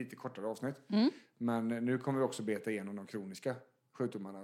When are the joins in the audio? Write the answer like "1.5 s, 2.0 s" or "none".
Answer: none